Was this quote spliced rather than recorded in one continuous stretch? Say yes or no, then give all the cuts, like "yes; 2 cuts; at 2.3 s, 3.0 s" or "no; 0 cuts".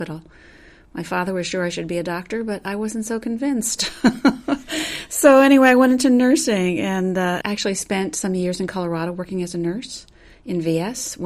yes; 1 cut; at 7.4 s